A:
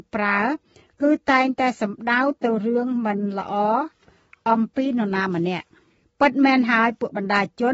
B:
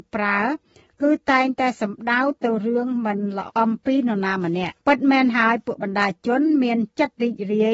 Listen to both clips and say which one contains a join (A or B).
B